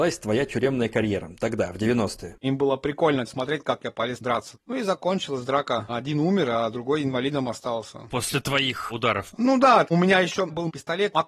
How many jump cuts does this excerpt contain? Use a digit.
1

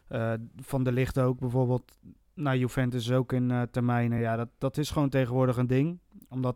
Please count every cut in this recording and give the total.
0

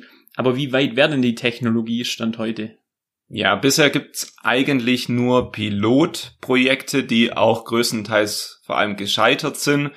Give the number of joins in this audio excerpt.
0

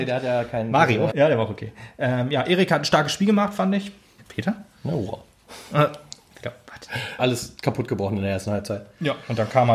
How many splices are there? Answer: 3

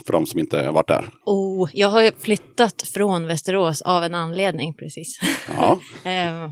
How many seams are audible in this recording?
0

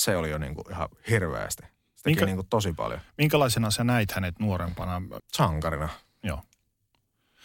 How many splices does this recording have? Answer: 1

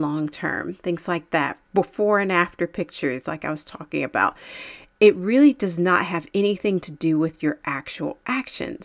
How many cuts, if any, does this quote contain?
0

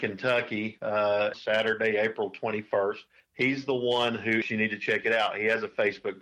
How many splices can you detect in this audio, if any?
3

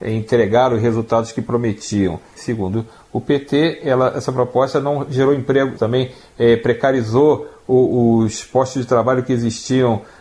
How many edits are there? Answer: 2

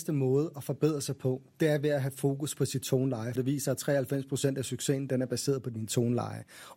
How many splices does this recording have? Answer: 1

